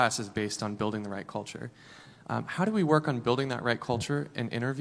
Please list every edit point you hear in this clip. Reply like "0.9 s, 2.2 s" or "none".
none